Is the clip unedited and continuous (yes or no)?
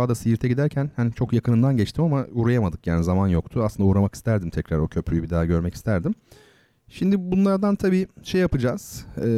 yes